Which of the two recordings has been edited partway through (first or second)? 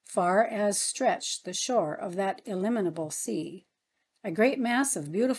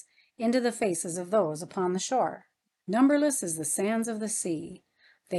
second